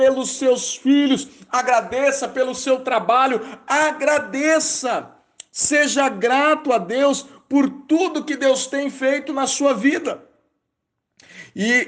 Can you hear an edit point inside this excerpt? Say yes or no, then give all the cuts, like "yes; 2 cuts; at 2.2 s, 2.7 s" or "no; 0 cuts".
no; 0 cuts